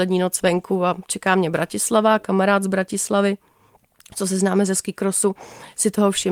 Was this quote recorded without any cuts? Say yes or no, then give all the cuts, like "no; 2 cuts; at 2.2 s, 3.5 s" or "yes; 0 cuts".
yes; 0 cuts